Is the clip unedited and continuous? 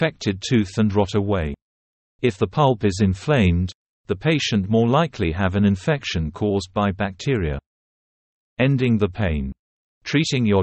no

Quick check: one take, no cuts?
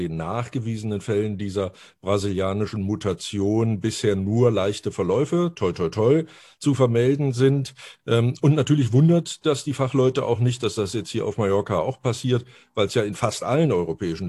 yes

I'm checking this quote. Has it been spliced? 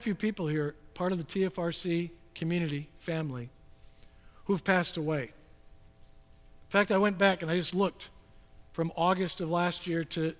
no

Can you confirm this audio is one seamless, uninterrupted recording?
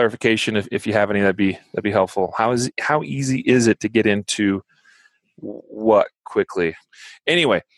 yes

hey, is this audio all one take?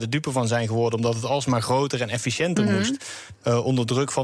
yes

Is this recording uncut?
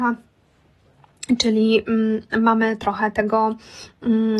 yes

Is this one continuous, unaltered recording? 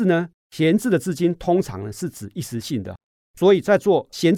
yes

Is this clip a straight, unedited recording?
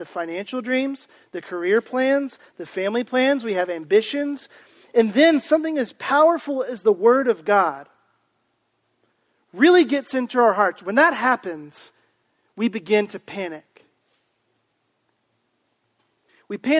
yes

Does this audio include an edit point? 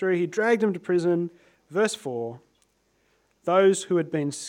no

